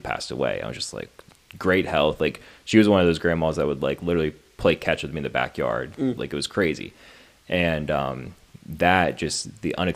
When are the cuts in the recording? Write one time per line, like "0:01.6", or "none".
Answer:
0:06.2